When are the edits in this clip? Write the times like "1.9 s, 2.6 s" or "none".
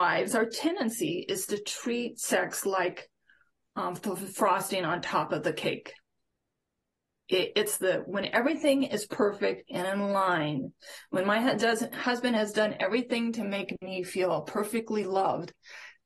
none